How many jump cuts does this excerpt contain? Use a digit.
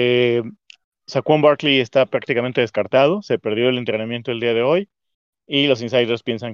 0